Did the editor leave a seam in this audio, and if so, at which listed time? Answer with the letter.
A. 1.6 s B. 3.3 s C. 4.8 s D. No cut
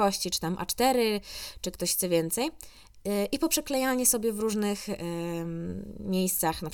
D